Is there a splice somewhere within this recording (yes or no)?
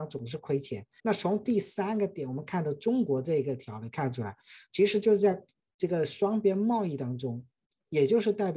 yes